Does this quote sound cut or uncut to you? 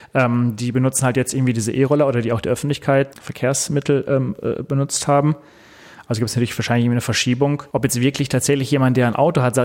cut